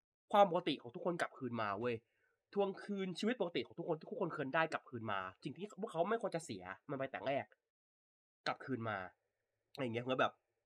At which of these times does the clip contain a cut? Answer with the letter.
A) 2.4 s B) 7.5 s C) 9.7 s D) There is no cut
D